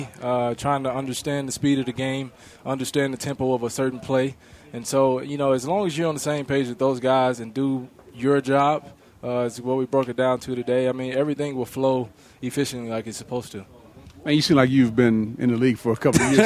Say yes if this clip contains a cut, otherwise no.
no